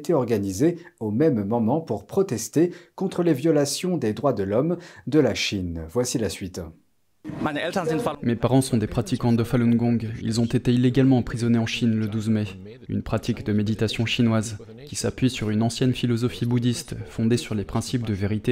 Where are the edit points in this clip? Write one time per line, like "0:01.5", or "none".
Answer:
0:12.9